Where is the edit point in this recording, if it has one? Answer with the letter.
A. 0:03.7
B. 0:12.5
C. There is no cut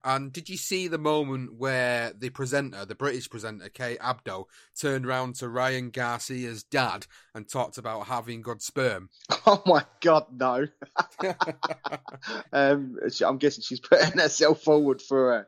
B